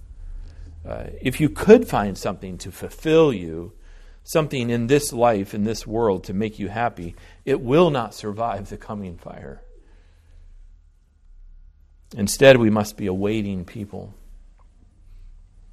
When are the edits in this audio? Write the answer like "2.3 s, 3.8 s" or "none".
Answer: none